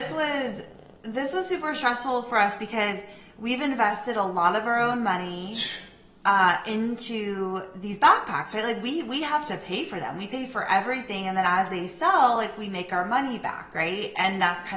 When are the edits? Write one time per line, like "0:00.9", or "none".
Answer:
none